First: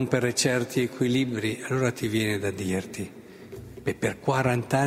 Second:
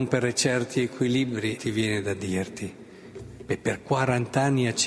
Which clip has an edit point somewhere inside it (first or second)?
second